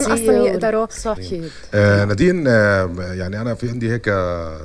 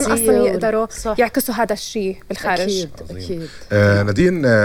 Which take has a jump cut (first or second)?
first